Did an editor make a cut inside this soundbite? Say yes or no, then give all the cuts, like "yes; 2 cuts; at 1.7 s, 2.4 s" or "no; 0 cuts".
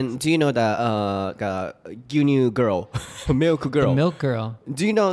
yes; 1 cut; at 1.4 s